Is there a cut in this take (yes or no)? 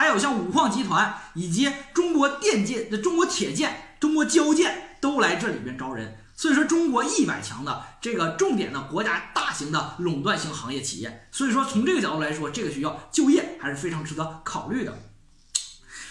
yes